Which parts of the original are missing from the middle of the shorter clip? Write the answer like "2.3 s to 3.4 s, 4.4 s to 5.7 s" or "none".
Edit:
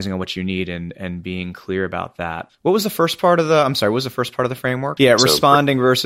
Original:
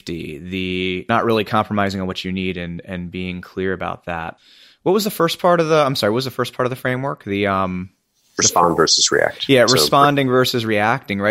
4.4 s to 4.8 s, 7.2 s to 9.5 s